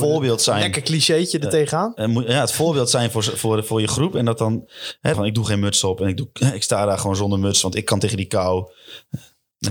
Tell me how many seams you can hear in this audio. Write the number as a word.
one